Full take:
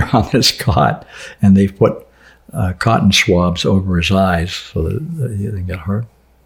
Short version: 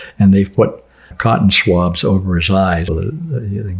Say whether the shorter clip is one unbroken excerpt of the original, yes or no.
no